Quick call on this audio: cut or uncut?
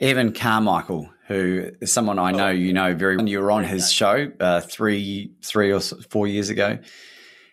cut